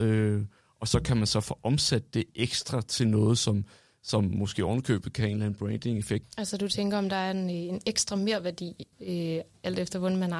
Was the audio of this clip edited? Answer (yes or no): yes